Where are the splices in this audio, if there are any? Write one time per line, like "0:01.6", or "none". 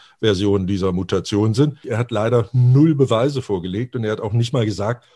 0:01.8

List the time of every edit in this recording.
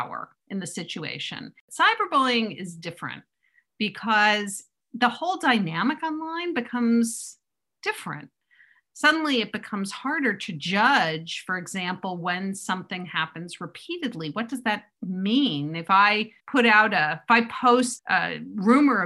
0:16.4
0:18.0

